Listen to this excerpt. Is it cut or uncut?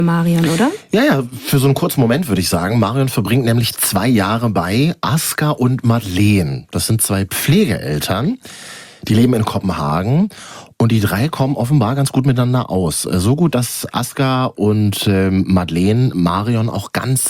uncut